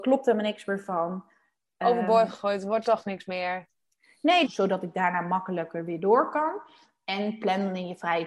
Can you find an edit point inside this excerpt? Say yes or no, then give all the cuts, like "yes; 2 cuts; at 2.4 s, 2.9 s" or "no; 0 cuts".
yes; 1 cut; at 4.4 s